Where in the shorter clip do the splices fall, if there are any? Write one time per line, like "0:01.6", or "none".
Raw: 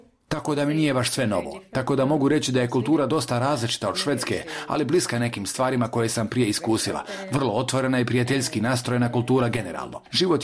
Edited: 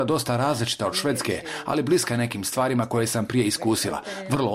none